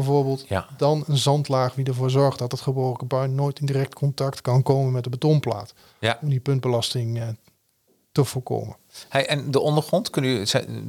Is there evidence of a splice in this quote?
no; 0 cuts

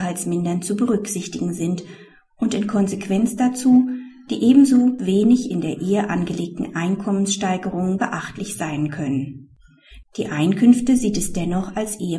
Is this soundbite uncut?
no; 1 cut; at 10.0 s

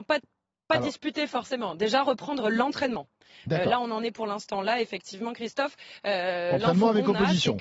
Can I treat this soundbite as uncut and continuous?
yes; 0 cuts

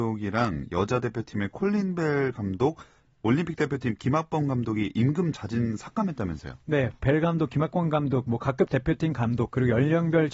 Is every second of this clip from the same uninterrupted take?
no; 1 cut; at 7.0 s

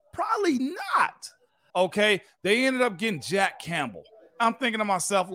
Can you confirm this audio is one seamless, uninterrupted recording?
no; 1 cut; at 1.7 s

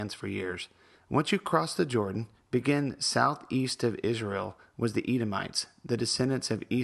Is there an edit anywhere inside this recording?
yes; 1 cut; at 0.9 s

